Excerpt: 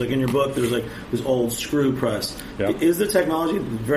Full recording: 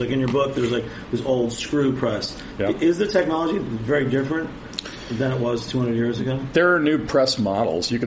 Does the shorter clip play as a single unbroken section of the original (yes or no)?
yes